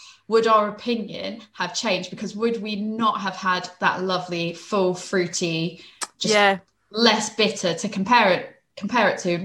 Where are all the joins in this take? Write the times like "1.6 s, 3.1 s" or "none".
none